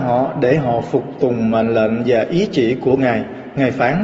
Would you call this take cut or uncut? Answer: uncut